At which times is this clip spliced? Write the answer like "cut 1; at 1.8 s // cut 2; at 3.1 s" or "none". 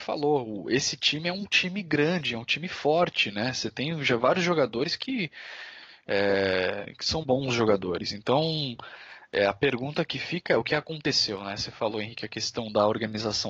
cut 1; at 7.2 s